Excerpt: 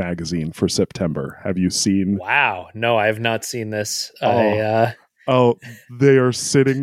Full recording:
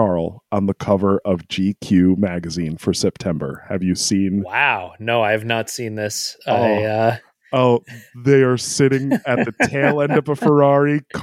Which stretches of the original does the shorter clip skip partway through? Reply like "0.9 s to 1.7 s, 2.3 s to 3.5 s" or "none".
none